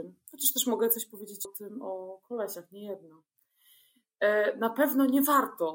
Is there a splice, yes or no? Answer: yes